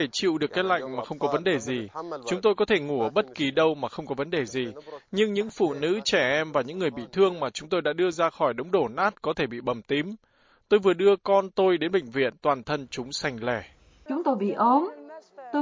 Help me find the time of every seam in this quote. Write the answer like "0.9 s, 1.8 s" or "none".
14.1 s